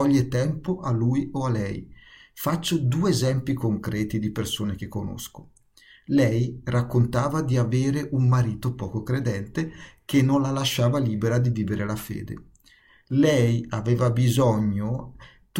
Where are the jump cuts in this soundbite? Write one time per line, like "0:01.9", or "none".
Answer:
none